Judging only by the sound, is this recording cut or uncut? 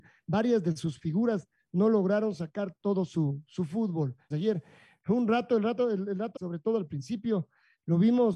cut